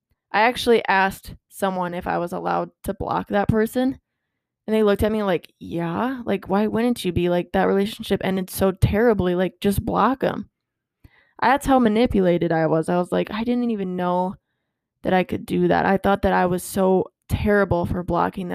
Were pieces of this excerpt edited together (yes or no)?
no